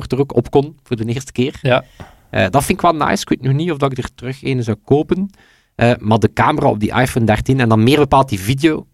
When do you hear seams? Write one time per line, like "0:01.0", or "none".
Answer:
none